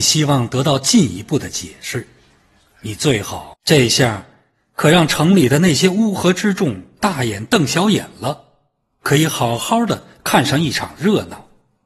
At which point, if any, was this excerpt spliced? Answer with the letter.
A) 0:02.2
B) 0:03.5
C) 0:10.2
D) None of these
B